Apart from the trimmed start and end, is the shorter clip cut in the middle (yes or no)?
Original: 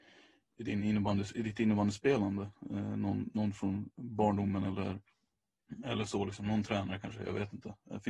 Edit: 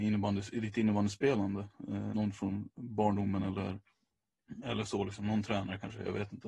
yes